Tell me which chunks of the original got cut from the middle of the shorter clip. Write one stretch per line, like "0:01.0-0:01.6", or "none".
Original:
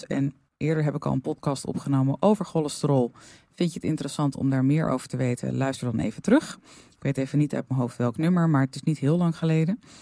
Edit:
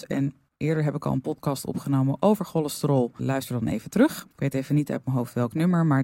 0:03.2-0:05.5
0:06.6-0:06.9